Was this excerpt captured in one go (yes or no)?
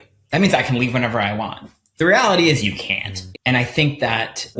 no